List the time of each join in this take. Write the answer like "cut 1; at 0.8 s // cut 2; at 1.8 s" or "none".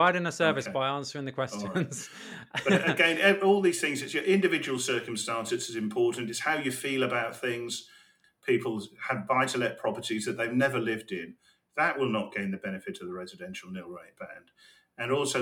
cut 1; at 8.2 s